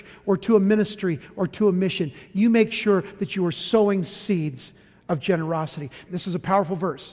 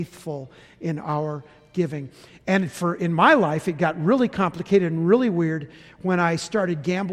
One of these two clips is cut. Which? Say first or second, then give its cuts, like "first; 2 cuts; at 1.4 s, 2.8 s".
first; 1 cut; at 6.1 s